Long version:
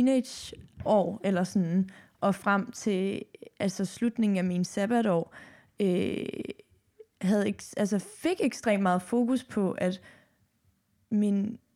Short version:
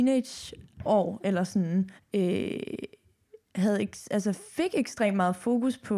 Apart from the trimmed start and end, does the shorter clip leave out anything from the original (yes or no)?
yes